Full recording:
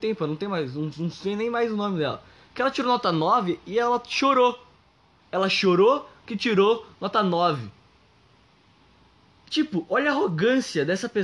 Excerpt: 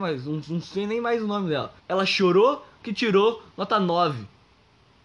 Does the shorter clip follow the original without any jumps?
no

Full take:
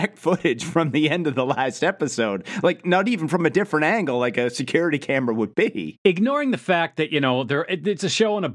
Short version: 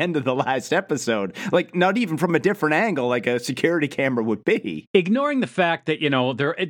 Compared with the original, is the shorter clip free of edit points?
yes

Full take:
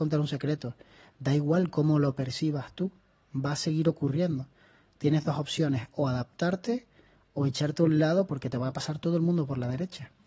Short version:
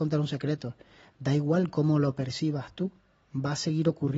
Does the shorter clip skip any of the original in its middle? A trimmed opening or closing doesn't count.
no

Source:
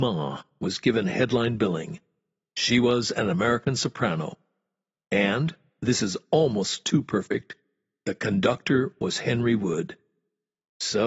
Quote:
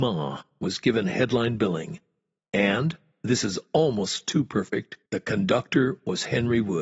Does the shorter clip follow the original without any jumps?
no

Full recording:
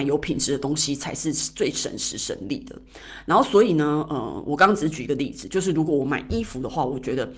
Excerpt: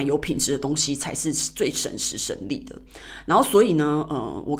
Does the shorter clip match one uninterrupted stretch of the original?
yes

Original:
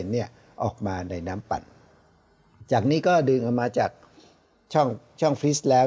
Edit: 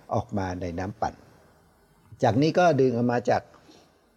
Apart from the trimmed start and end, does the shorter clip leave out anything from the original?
no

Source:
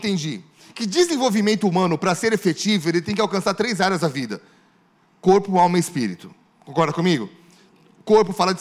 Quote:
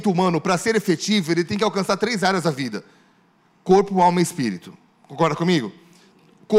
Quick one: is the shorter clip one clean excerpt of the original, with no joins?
yes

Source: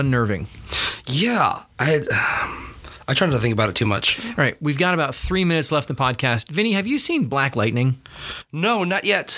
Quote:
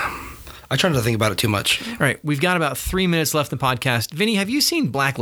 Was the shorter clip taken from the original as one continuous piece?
yes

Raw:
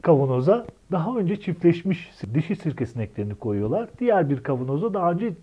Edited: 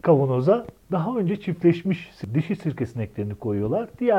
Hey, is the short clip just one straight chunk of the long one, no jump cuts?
yes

